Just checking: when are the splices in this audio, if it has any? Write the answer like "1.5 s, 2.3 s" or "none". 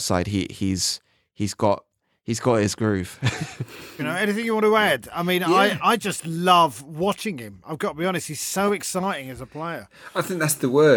4.0 s